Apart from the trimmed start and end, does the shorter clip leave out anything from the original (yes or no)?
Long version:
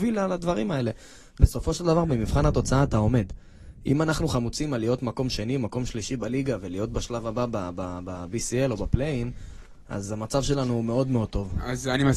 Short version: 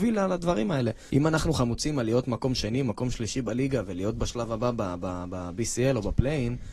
yes